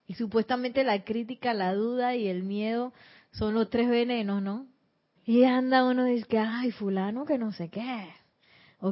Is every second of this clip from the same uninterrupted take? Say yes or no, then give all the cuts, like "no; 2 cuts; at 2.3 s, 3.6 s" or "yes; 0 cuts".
no; 1 cut; at 5.2 s